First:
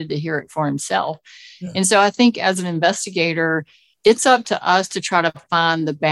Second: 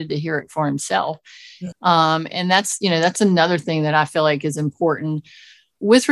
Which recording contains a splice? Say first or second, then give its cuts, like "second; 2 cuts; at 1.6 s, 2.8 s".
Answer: second; 1 cut; at 1.7 s